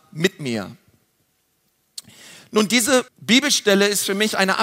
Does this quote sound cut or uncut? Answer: cut